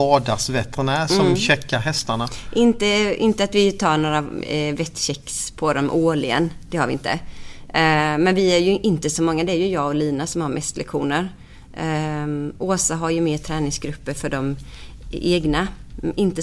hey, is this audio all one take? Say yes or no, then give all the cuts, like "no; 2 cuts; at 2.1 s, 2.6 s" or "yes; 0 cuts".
yes; 0 cuts